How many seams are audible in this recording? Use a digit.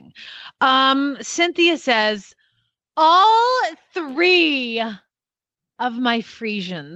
0